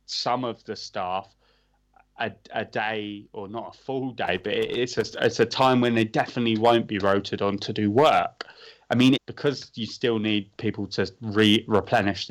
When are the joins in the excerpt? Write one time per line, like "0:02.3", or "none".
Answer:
0:09.1